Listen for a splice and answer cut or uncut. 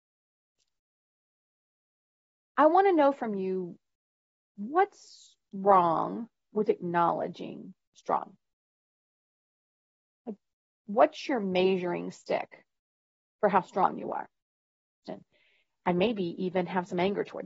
cut